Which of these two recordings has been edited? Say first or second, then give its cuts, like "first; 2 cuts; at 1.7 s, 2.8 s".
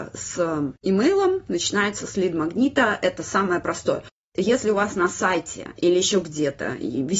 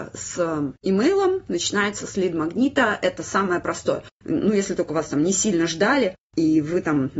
second; 1 cut; at 4.2 s